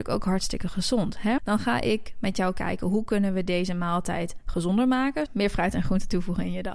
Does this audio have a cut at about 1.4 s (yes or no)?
yes